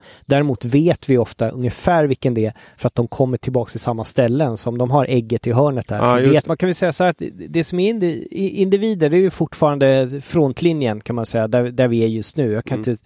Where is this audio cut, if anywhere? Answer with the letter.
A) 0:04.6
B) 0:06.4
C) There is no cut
B